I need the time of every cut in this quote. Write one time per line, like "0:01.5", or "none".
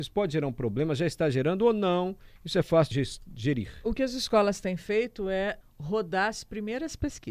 0:02.9
0:05.6